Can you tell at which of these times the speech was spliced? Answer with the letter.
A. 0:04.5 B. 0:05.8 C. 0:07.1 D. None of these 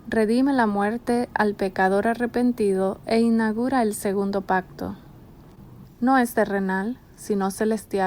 B